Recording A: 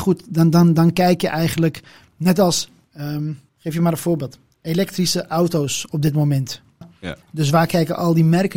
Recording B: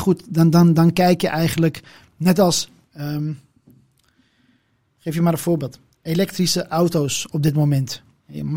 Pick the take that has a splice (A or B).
A